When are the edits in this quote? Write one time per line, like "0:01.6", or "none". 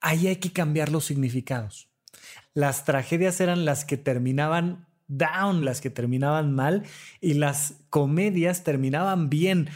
0:02.4
0:05.6